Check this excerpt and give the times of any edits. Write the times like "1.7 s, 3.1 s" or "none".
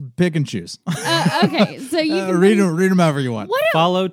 none